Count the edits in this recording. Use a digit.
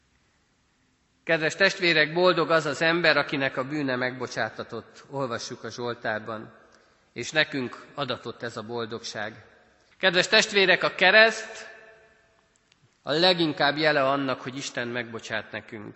1